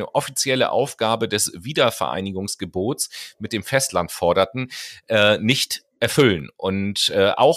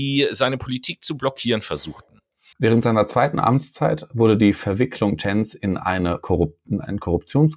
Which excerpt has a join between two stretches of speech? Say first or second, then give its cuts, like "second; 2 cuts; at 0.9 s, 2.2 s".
second; 1 cut; at 2.5 s